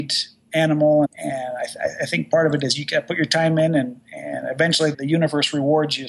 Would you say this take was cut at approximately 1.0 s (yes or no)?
yes